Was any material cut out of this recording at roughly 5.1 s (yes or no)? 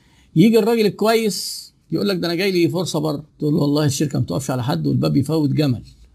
no